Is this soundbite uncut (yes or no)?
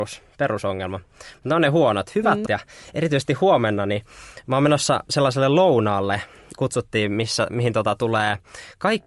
no